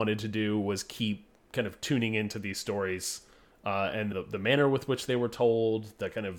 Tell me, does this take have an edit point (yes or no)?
yes